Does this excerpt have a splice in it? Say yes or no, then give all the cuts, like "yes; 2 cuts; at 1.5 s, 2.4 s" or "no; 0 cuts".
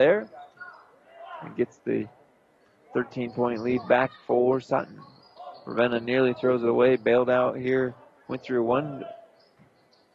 no; 0 cuts